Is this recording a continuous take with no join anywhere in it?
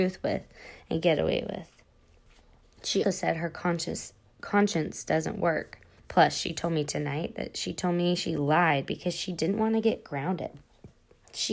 no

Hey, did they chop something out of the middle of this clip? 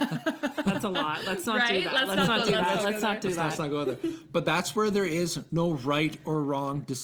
no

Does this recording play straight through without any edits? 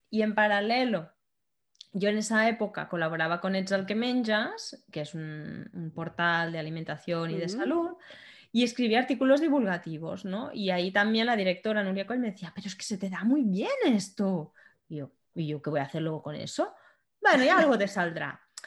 no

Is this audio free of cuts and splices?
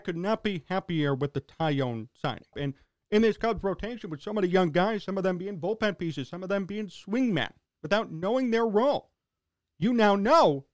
no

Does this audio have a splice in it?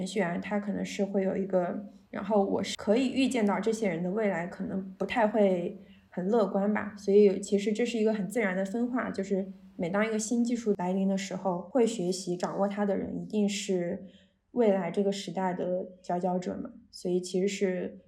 yes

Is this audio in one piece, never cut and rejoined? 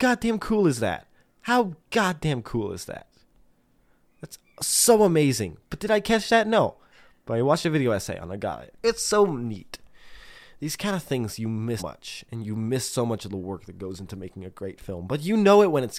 no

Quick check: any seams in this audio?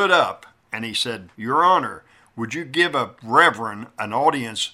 yes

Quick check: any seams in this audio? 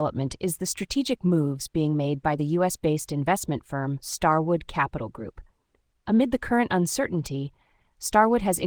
no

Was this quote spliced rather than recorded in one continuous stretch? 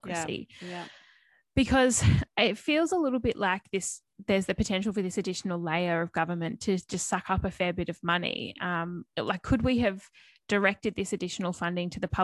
no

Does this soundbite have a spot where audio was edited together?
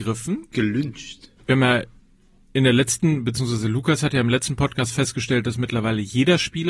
yes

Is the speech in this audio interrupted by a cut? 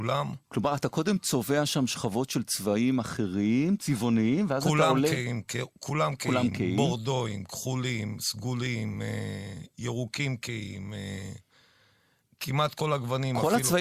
no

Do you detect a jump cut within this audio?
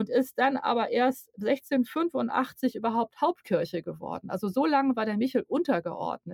no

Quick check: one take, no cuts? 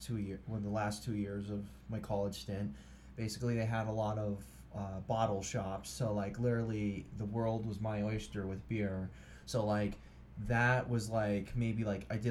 yes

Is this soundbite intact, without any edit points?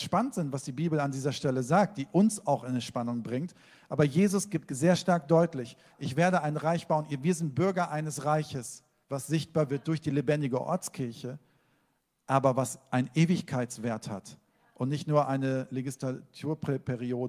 no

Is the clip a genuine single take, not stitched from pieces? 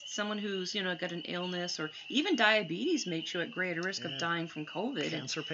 yes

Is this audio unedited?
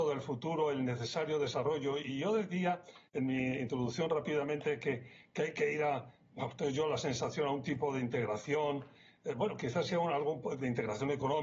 yes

